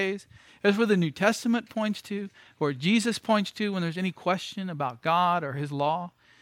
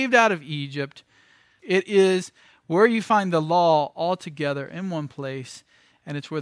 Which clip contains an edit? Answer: second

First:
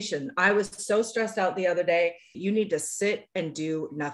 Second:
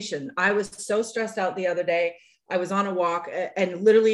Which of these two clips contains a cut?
first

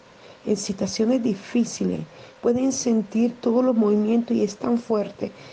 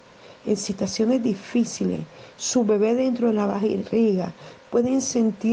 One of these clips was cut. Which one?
first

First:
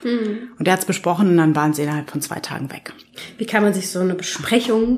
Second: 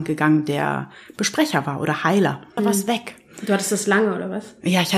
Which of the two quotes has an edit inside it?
second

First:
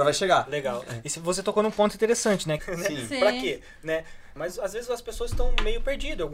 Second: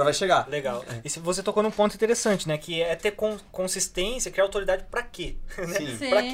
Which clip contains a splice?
first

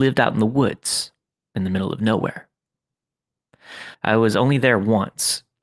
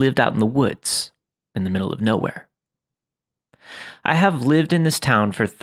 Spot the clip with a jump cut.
first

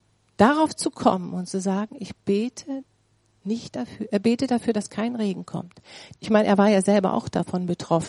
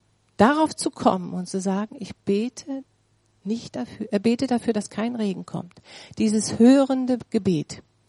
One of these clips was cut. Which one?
first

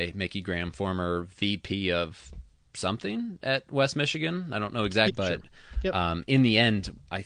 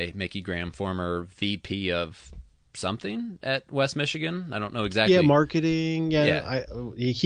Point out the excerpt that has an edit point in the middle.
first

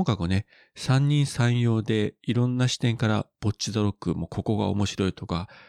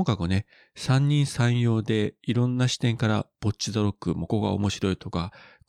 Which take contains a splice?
second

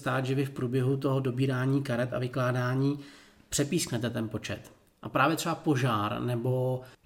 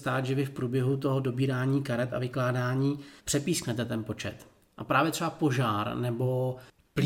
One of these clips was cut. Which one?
second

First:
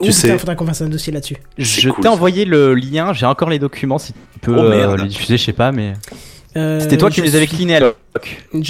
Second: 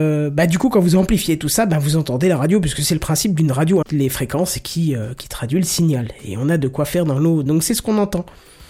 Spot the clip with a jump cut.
second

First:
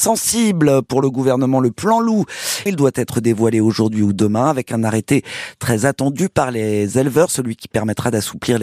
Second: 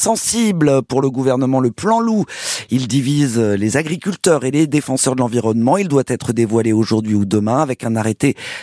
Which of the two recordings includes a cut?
first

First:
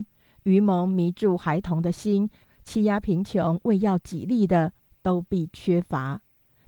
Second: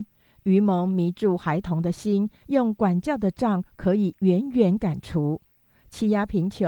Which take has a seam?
first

